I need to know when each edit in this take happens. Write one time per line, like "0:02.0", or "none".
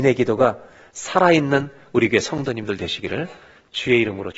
none